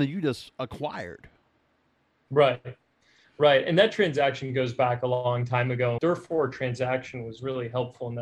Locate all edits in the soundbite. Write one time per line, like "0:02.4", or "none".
0:06.0